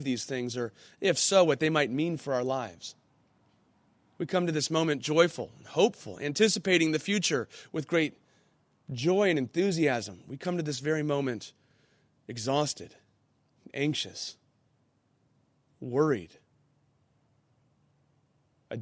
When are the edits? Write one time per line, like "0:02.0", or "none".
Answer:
none

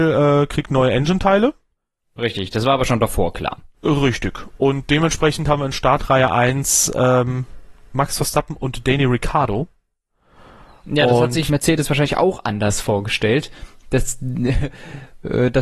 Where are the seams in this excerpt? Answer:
0:03.7
0:11.5

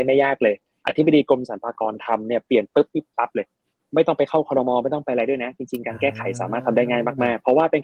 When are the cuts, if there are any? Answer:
0:03.1

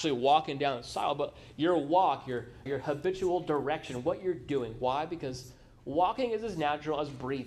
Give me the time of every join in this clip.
0:02.7

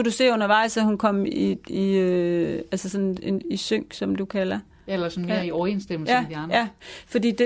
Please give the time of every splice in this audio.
none

